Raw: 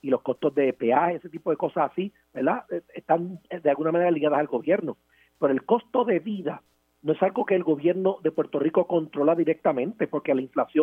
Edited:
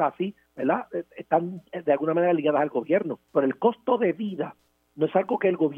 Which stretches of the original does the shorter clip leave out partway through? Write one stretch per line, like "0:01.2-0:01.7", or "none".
0:05.0-0:05.3